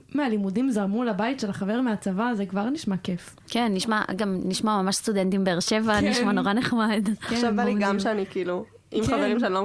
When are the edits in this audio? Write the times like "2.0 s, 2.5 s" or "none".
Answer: none